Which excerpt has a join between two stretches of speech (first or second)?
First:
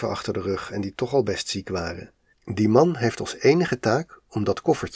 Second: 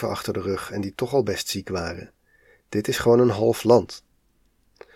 first